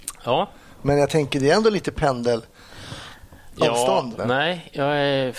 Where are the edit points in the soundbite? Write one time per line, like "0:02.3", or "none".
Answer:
0:04.2